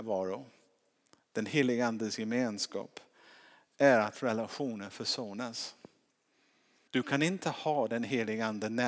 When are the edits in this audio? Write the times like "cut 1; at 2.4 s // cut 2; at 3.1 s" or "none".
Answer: cut 1; at 6.9 s

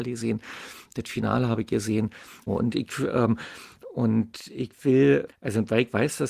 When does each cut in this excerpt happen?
cut 1; at 2.5 s // cut 2; at 5.3 s

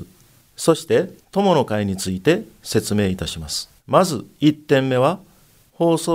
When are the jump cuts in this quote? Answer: cut 1; at 1.2 s // cut 2; at 3.8 s

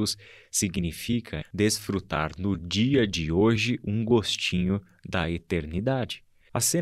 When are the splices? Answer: cut 1; at 1.4 s

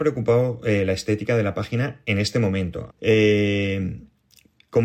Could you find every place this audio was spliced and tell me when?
cut 1; at 2.9 s

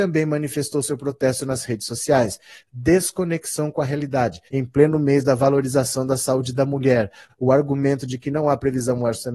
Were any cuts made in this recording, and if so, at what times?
cut 1; at 4.5 s // cut 2; at 7.3 s

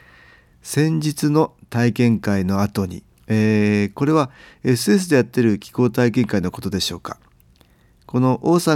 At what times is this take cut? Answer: cut 1; at 3.1 s

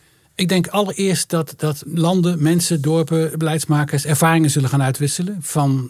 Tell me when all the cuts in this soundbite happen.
cut 1; at 3.3 s

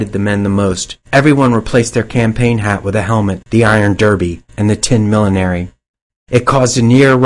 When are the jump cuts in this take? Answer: cut 1; at 1.0 s // cut 2; at 3.5 s // cut 3; at 6.1 s

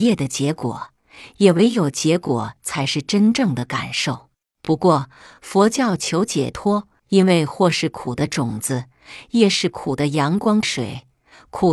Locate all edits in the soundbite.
cut 1; at 4.5 s // cut 2; at 7.0 s // cut 3; at 10.6 s

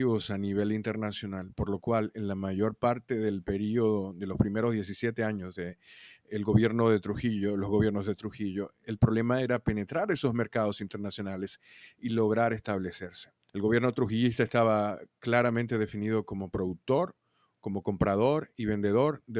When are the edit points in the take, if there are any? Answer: cut 1; at 8.8 s // cut 2; at 13.5 s

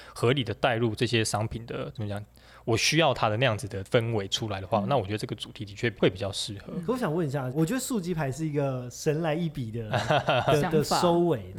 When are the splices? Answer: cut 1; at 7.5 s

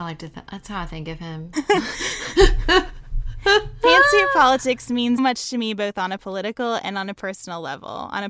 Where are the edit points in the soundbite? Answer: cut 1; at 1.5 s // cut 2; at 5.2 s

